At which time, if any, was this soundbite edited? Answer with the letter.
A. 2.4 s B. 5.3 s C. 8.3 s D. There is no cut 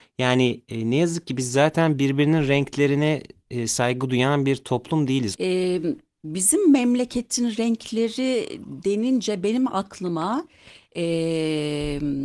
B